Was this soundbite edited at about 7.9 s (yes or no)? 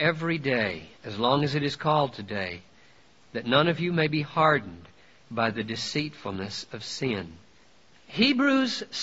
yes